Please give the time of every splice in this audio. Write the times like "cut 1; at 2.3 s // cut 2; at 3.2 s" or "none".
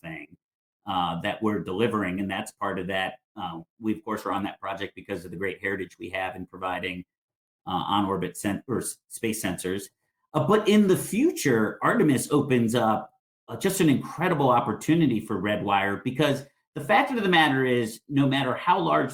none